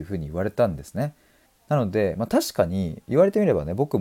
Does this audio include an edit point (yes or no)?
yes